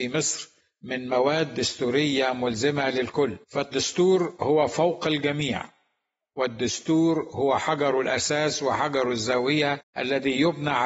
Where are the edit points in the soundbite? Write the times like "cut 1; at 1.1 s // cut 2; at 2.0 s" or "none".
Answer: cut 1; at 3.4 s